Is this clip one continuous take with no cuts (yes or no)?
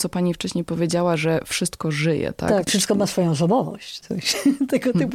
no